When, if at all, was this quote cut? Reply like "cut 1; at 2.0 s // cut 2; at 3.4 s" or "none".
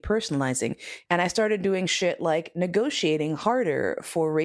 cut 1; at 1.1 s